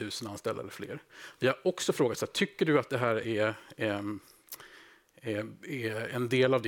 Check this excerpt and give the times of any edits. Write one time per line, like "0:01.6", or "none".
none